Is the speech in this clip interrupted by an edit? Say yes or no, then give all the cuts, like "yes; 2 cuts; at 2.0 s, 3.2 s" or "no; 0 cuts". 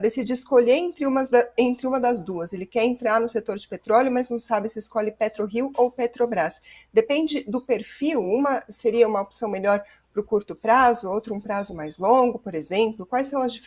no; 0 cuts